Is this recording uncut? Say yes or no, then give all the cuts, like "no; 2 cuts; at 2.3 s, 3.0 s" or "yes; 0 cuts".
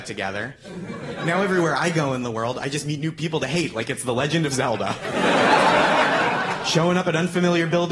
yes; 0 cuts